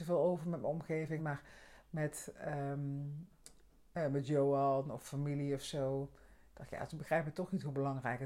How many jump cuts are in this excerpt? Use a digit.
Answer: 2